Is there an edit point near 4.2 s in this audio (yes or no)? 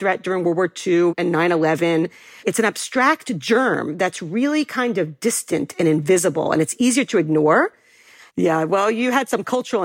no